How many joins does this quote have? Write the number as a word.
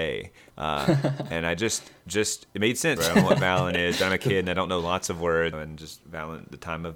two